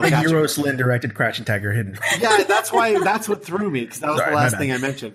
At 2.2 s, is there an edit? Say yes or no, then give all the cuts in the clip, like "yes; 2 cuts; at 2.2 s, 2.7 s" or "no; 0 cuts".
no; 0 cuts